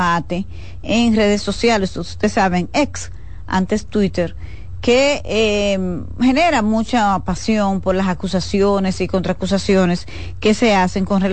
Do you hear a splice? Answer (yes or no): no